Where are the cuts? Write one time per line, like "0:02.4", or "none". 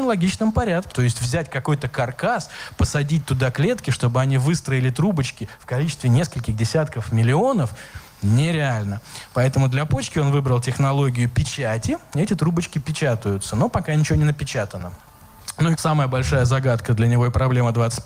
0:00.9
0:15.8